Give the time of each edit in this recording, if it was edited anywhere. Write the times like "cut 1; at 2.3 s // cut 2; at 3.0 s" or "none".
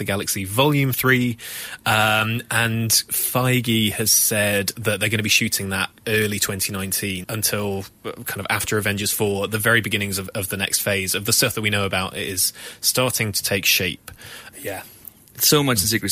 cut 1; at 7.2 s // cut 2; at 14.5 s